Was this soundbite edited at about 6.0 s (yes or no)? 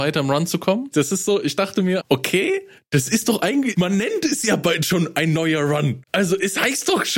no